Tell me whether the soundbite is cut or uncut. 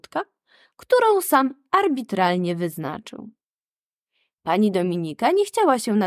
uncut